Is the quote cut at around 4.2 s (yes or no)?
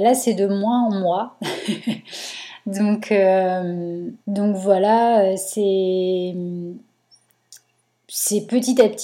yes